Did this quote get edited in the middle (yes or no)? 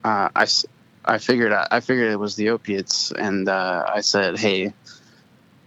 no